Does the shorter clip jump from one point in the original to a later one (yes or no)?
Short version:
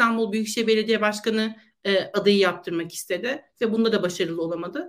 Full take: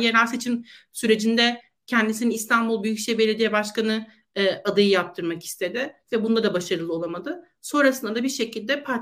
no